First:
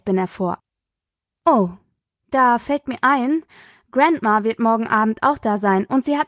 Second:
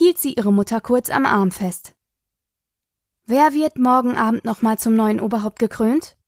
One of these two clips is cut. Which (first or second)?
first